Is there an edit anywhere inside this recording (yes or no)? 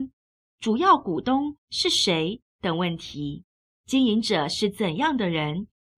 yes